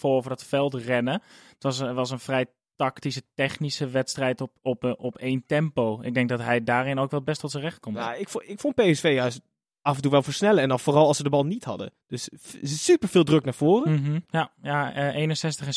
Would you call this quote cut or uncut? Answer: cut